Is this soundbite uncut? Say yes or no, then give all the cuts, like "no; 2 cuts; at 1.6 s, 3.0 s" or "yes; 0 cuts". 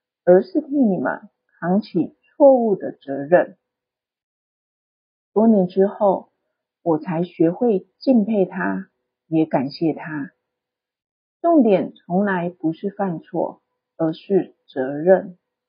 yes; 0 cuts